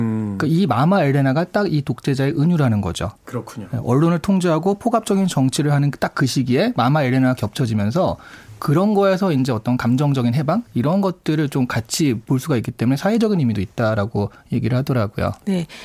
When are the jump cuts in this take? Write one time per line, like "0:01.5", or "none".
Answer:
none